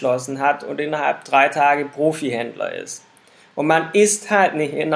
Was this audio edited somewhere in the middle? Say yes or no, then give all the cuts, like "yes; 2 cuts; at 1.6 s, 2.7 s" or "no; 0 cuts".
no; 0 cuts